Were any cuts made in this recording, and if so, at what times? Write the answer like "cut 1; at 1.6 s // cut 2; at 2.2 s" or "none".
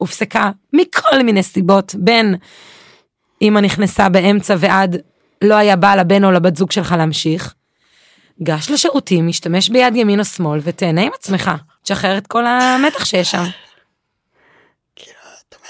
none